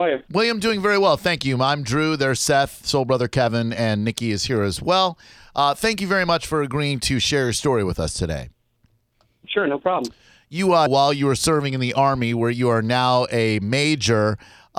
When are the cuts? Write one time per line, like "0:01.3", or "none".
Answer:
0:10.9